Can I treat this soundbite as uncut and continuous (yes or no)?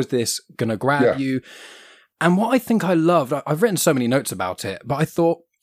yes